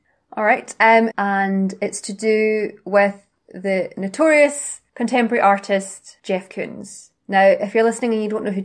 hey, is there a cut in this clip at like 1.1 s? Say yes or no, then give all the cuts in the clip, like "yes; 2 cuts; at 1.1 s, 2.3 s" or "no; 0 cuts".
yes; 1 cut; at 1.1 s